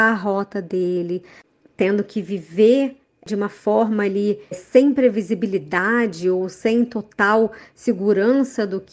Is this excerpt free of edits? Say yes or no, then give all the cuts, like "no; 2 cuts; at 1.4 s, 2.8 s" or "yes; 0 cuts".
no; 1 cut; at 4.5 s